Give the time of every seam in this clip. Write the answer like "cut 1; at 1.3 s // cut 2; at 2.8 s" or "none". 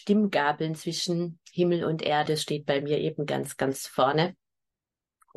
cut 1; at 2.3 s

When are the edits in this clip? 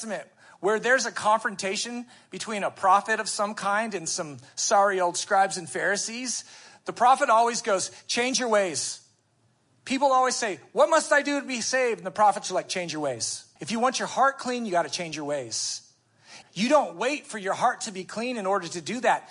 cut 1; at 13.6 s // cut 2; at 16.4 s

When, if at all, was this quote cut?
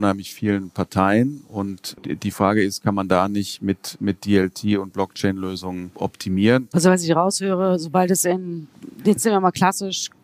cut 1; at 6.7 s

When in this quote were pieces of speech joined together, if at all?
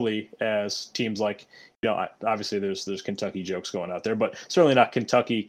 none

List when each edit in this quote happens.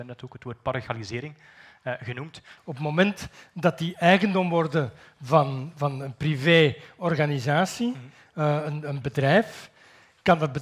cut 1; at 2.6 s

